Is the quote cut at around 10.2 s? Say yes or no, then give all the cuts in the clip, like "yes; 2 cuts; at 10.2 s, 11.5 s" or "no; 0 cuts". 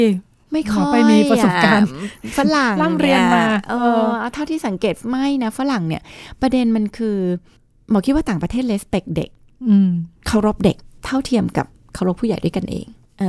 yes; 1 cut; at 10.2 s